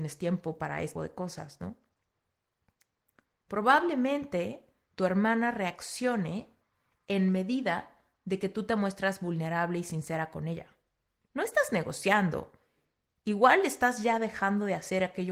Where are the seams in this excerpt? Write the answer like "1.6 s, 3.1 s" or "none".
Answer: 0.9 s, 11.2 s

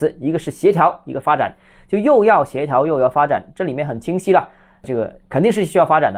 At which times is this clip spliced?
none

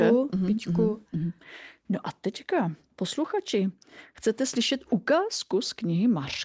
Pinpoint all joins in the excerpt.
1.8 s

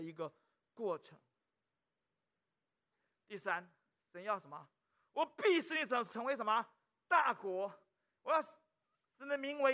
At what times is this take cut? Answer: none

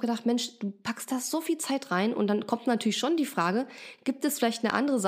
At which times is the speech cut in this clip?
none

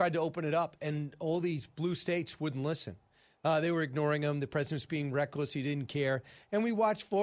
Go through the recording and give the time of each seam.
none

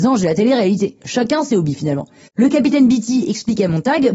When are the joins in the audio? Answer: 1.0 s, 2.3 s

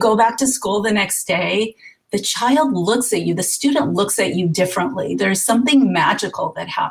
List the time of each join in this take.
none

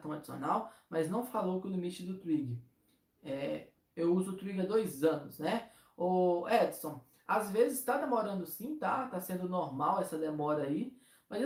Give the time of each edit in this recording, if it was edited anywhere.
none

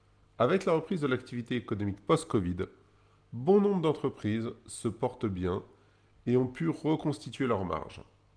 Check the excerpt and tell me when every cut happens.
none

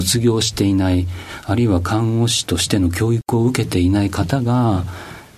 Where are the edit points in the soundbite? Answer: none

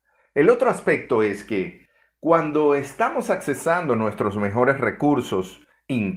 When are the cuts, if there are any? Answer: none

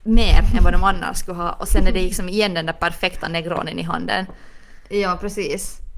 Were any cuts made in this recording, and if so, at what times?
1.7 s

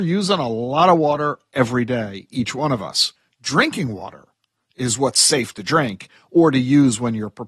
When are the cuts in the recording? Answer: 3.3 s

